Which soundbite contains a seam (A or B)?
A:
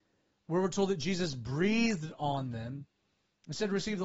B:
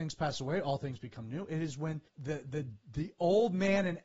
B